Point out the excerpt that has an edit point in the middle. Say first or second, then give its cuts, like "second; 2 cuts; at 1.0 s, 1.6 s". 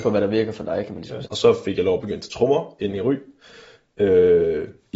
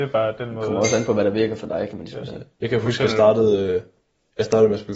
first; 1 cut; at 1.3 s